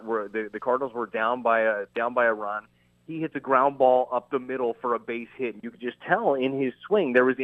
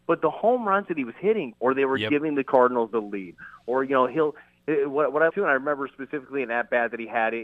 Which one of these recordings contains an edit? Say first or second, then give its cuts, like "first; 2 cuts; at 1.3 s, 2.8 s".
second; 2 cuts; at 1.5 s, 5.3 s